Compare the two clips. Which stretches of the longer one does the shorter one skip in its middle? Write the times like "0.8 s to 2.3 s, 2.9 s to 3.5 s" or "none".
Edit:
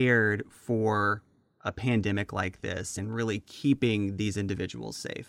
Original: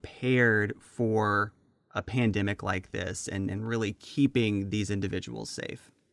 3.3 s to 3.5 s